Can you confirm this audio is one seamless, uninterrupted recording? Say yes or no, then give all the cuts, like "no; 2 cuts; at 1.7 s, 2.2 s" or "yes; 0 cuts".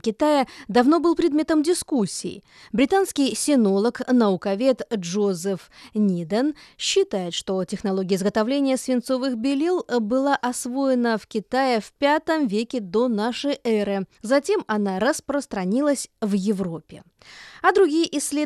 no; 1 cut; at 14.1 s